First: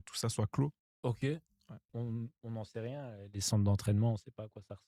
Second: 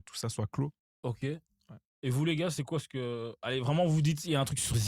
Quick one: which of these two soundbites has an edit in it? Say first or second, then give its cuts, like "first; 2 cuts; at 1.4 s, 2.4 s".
first; 1 cut; at 1.9 s